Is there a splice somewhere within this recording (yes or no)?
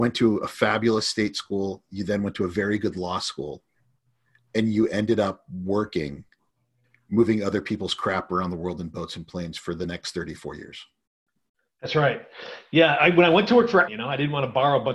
yes